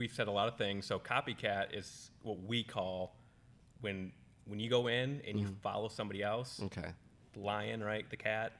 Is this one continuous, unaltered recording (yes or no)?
yes